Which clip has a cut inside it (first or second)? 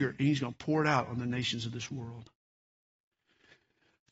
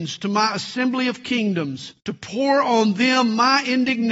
second